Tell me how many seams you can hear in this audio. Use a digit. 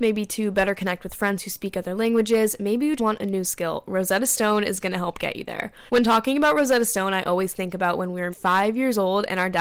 3